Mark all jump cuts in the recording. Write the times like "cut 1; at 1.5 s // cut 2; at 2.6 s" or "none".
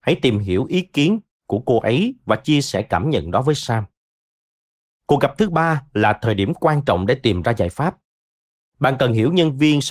none